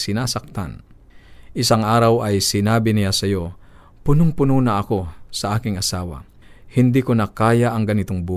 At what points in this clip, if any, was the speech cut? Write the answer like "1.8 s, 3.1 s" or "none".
none